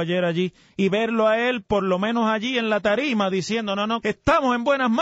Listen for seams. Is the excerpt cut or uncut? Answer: cut